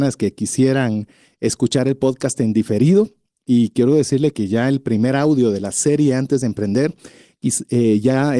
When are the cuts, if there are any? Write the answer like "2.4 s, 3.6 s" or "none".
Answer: none